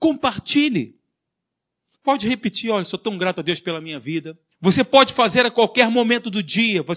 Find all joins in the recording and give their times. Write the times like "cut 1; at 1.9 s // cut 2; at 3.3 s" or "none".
cut 1; at 1.9 s // cut 2; at 4.5 s